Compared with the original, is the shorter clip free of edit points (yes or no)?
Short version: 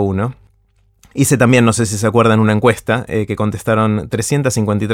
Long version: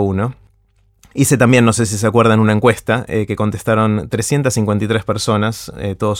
yes